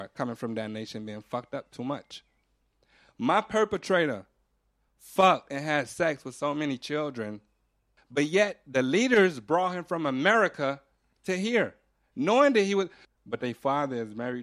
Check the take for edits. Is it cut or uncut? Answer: cut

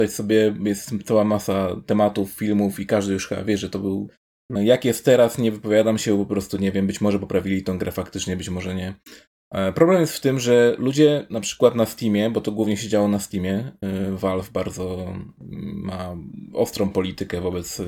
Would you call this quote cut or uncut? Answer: cut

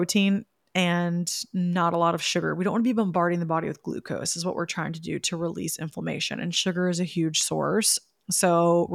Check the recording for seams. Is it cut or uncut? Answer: uncut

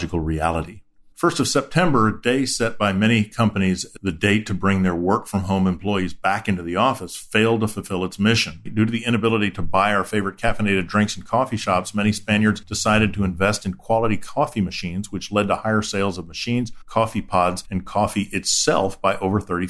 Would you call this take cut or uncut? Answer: cut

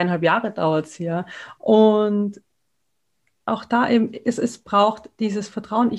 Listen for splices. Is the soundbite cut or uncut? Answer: cut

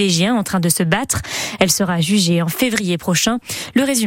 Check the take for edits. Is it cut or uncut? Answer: uncut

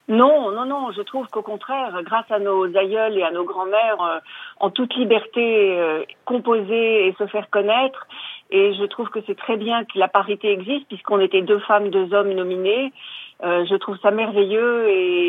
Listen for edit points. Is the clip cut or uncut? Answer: cut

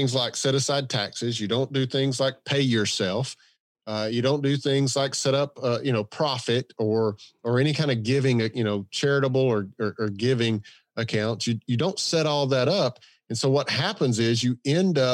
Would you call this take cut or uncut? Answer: uncut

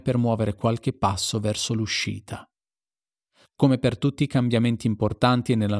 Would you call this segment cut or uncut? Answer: cut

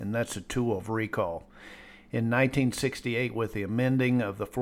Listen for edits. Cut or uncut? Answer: uncut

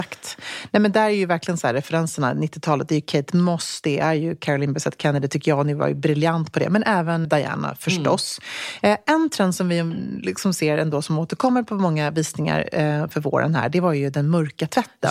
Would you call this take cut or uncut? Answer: cut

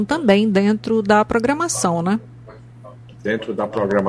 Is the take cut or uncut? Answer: uncut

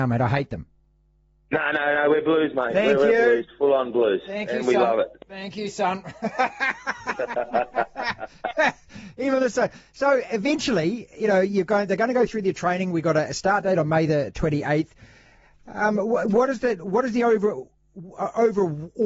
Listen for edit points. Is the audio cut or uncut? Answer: uncut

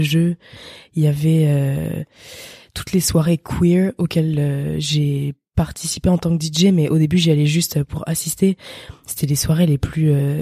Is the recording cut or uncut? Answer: uncut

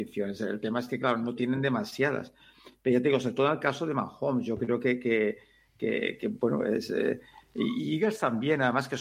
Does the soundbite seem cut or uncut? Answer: uncut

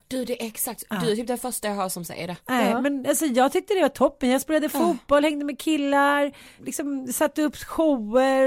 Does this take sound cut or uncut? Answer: cut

